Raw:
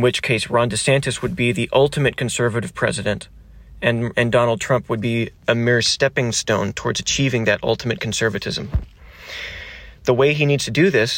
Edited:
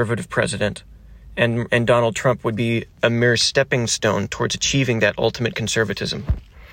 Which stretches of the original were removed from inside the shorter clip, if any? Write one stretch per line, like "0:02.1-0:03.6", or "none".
none